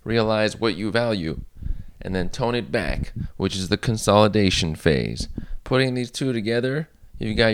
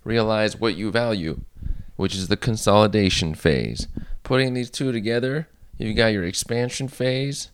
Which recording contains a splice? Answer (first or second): second